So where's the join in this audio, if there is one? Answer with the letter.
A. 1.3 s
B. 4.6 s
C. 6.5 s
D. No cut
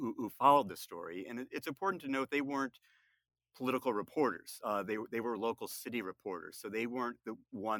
D